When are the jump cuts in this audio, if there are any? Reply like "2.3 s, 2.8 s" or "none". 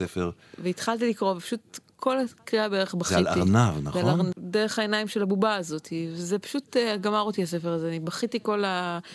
4.3 s